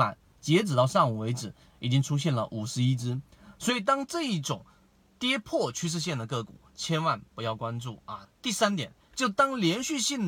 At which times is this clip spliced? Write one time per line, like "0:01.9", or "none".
0:08.2